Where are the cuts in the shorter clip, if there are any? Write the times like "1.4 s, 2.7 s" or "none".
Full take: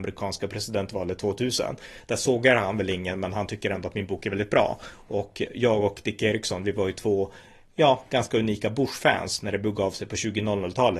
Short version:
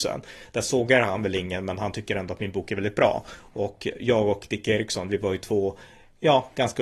none

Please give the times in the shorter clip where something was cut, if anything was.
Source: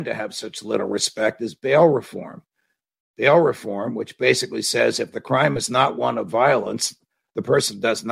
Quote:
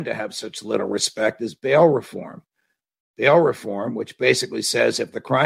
none

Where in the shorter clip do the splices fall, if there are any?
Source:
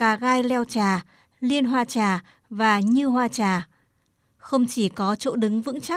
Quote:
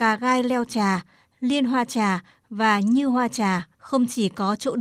3.7 s

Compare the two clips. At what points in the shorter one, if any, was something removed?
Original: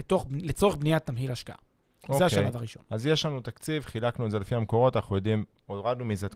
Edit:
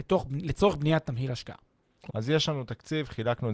2.1 s

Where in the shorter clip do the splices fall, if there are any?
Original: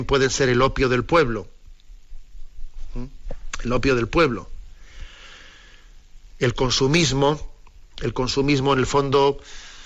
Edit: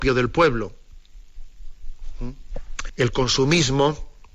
2.9 s

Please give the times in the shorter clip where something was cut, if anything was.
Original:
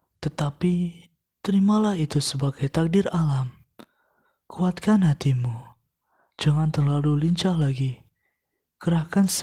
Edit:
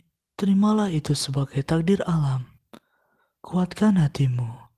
none

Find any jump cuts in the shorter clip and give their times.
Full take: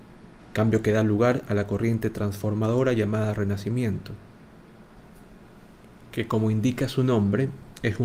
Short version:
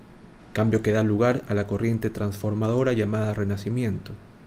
none

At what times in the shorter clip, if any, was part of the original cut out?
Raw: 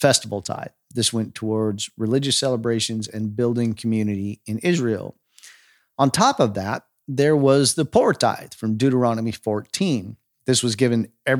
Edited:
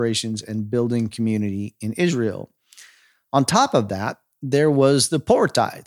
none

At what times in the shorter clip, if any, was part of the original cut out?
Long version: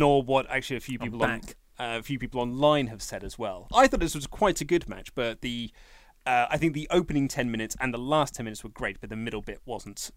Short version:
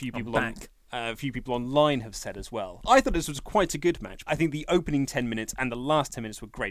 4.3 s

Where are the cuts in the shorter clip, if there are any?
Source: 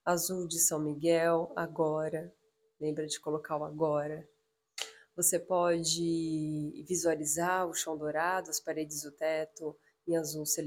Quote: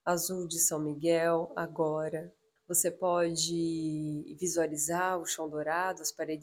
2.6 s

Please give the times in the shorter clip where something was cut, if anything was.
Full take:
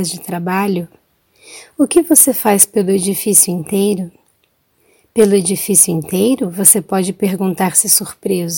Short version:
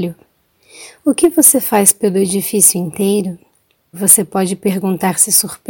3.9 s

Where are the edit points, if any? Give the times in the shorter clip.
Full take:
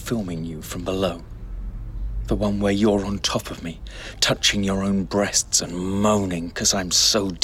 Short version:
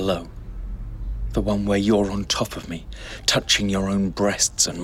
none

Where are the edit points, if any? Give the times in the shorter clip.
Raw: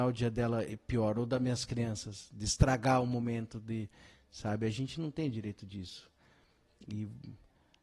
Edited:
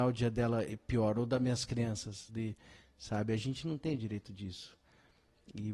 2.3 s

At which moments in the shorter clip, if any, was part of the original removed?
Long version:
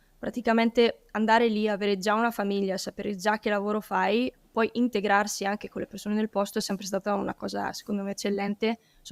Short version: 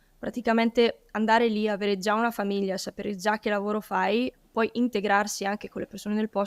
none

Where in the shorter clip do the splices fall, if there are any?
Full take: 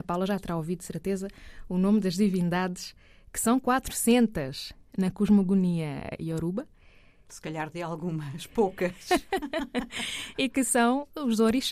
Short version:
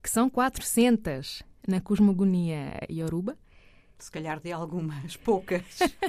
none

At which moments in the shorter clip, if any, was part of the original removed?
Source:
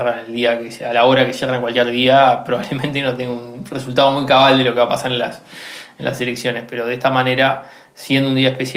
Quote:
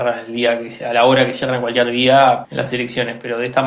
2.4 s

